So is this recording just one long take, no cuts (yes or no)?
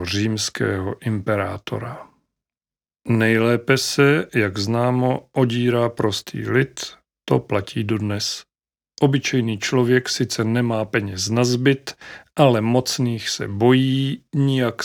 yes